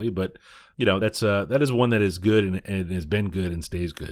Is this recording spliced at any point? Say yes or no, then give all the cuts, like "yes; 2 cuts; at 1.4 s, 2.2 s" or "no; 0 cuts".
no; 0 cuts